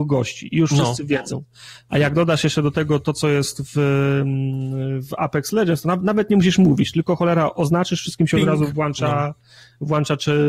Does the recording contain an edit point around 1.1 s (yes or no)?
no